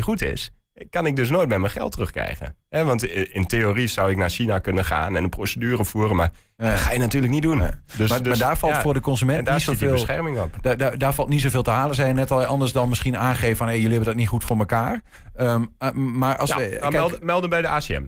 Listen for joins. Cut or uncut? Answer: uncut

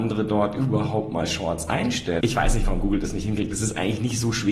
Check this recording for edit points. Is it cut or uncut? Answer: cut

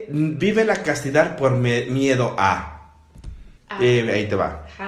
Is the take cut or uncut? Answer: cut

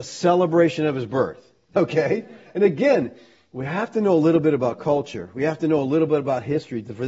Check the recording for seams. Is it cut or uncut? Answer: cut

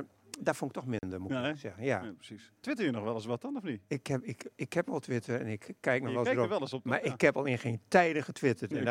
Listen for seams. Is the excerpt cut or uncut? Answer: uncut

